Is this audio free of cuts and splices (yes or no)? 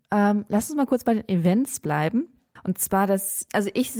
no